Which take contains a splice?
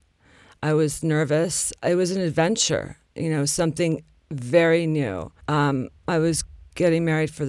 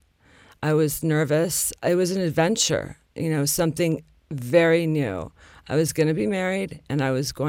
first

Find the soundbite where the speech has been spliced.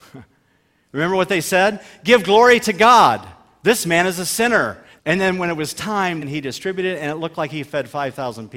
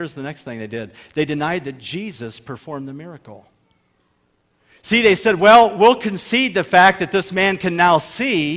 first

